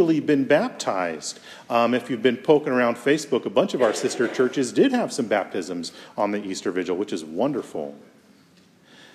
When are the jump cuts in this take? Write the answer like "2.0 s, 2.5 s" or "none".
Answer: none